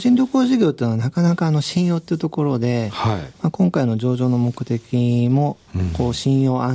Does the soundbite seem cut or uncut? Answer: uncut